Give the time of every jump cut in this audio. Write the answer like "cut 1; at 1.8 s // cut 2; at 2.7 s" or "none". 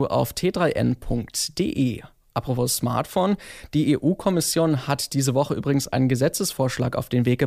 none